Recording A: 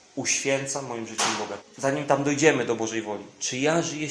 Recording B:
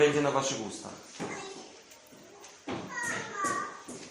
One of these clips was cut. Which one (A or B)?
A